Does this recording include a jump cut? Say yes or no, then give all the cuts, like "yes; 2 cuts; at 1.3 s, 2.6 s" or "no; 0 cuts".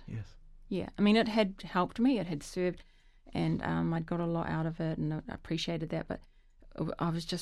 no; 0 cuts